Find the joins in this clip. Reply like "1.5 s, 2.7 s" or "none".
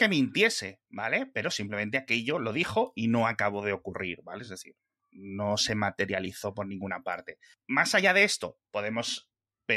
none